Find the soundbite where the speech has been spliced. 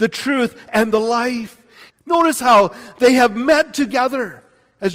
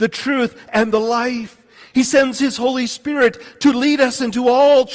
first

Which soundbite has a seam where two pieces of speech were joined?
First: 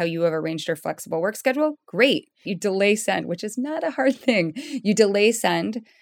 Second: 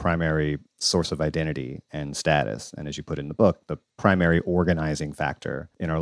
first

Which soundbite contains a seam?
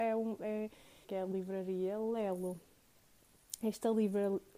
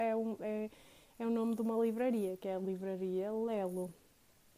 first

